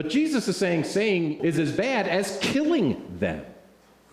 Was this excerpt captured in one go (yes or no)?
no